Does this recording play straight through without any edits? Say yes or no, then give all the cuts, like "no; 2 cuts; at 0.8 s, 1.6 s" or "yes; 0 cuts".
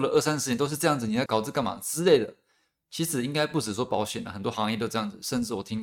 no; 1 cut; at 1.3 s